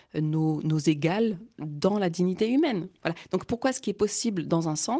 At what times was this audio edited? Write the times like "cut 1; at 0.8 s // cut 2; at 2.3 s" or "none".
cut 1; at 3.0 s